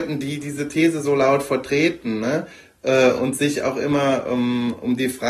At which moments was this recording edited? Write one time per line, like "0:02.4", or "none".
none